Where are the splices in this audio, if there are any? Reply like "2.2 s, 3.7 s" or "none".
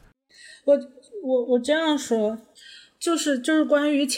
none